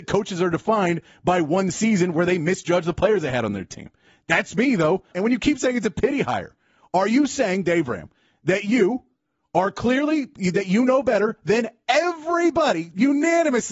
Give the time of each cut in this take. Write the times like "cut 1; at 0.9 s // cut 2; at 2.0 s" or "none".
cut 1; at 5.1 s

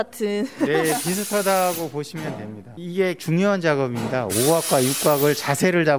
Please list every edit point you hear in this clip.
none

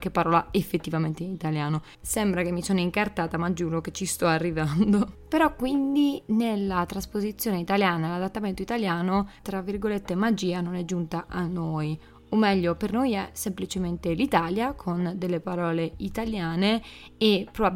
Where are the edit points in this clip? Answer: cut 1; at 9.4 s

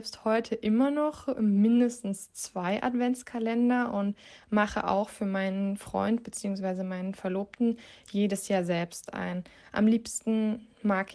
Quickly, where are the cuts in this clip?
none

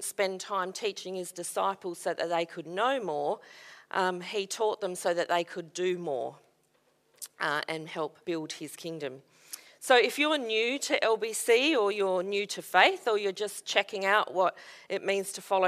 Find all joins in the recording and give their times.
cut 1; at 8.2 s

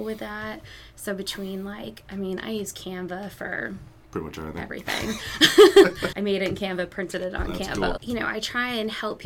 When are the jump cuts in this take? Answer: cut 1; at 6.1 s // cut 2; at 8.0 s

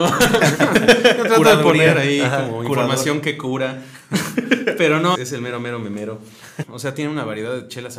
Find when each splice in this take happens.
cut 1; at 5.2 s // cut 2; at 6.6 s

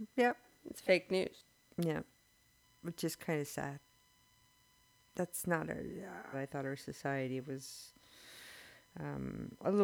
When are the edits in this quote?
cut 1; at 6.3 s

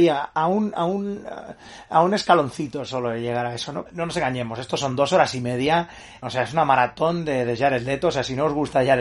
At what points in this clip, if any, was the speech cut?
cut 1; at 3.9 s // cut 2; at 6.2 s

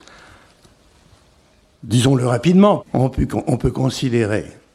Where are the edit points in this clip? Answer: cut 1; at 2.8 s

